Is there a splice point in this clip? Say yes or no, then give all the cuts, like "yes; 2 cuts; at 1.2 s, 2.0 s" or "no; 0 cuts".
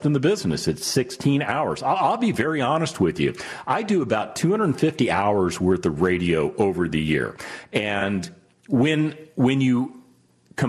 no; 0 cuts